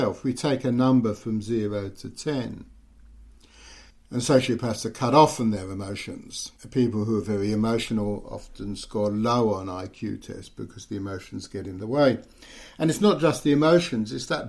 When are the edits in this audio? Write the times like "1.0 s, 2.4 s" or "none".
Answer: 3.9 s, 6.6 s